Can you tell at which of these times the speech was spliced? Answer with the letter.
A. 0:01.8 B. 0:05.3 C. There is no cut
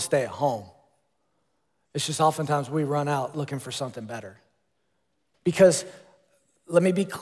B